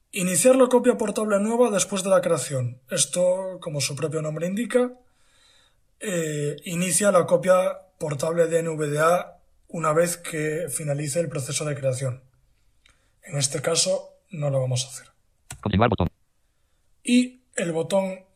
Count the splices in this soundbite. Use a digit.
0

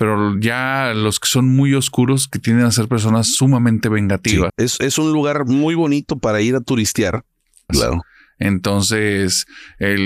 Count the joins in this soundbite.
2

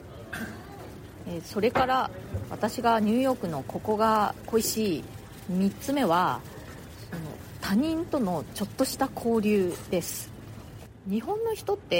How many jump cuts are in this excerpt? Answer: 0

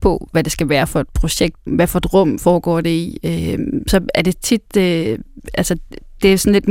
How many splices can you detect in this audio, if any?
1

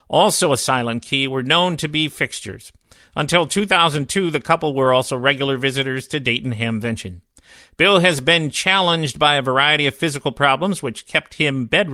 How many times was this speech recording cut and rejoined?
0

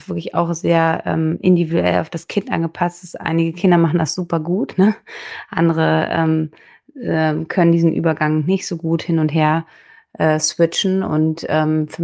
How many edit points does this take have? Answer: 0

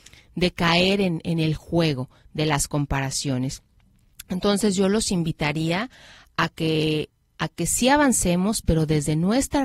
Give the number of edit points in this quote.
1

